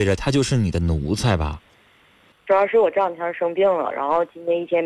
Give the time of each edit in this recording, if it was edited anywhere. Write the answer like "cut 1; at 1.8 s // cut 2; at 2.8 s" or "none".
cut 1; at 2.3 s